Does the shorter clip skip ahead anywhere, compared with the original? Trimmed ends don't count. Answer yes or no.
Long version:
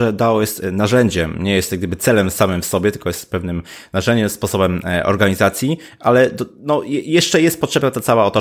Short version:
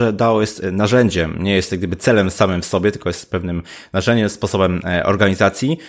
no